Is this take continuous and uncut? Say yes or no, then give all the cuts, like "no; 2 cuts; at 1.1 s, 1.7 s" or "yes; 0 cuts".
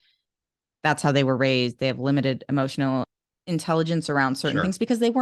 yes; 0 cuts